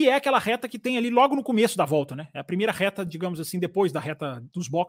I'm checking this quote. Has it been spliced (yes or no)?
no